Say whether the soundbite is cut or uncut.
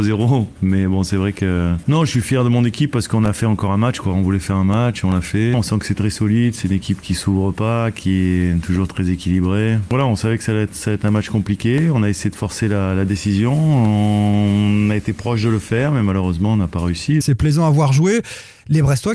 cut